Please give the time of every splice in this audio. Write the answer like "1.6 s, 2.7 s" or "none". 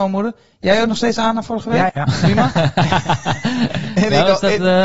1.9 s